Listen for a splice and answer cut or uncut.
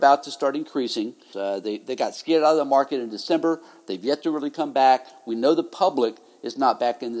cut